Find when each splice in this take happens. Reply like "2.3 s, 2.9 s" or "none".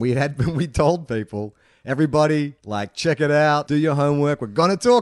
2.6 s, 3.6 s